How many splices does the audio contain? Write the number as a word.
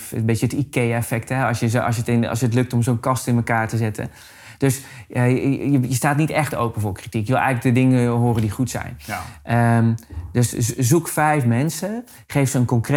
zero